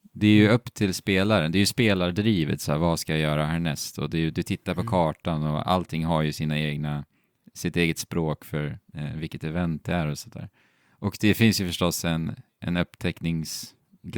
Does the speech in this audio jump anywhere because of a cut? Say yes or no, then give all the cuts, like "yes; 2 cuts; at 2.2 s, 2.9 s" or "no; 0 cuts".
no; 0 cuts